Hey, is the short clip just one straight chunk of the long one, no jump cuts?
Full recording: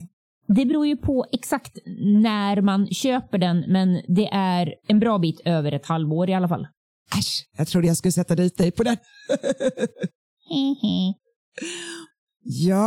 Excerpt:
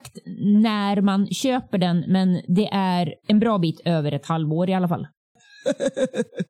no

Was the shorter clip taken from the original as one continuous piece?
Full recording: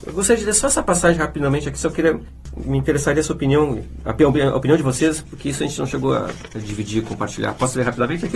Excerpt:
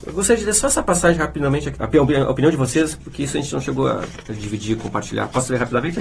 no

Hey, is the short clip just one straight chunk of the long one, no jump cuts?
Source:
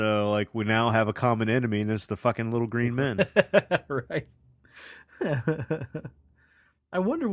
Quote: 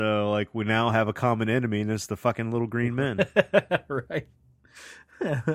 yes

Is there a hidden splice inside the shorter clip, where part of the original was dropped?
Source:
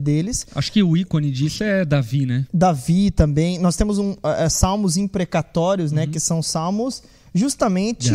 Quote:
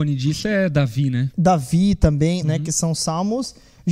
yes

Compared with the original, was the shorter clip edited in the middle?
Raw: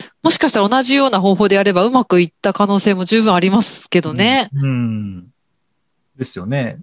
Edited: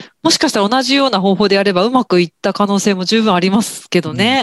no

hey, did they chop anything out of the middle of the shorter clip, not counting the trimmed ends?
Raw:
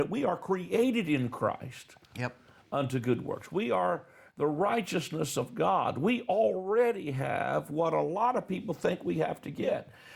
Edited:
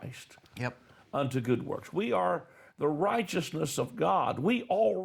no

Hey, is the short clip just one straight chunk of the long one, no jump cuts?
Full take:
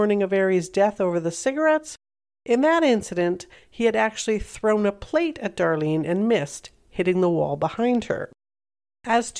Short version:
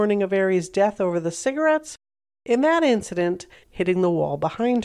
no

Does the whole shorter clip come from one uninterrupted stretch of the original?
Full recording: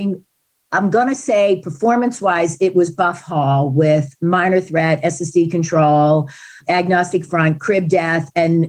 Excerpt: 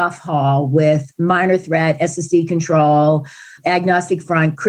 yes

